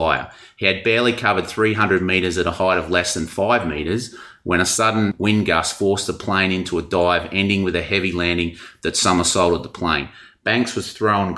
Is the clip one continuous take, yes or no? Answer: yes